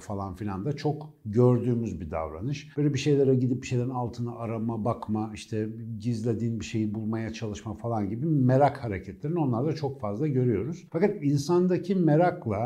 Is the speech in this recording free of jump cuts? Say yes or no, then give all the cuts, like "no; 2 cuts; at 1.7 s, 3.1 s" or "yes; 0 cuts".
yes; 0 cuts